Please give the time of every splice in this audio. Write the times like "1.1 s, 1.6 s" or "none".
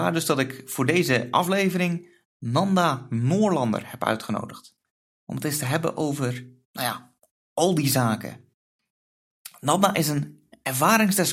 none